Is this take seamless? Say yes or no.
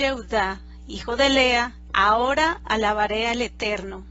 no